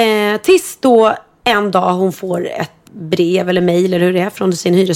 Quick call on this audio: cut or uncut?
cut